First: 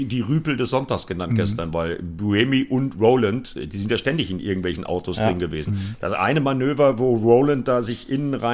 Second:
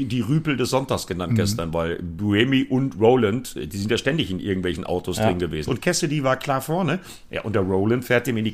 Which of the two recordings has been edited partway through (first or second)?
second